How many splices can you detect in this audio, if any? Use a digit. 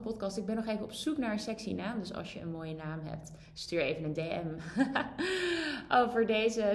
0